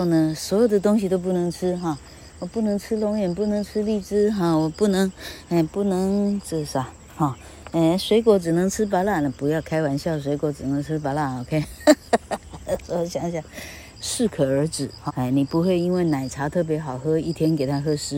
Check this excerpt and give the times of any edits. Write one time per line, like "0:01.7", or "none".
0:13.9
0:15.1